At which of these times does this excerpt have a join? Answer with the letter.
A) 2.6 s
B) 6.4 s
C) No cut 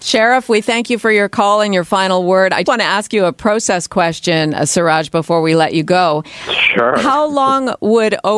A